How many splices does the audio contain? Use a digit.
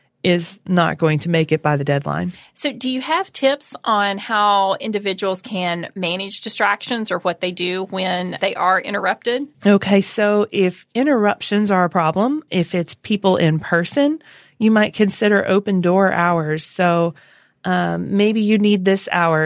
1